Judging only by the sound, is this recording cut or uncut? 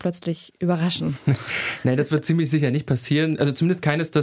uncut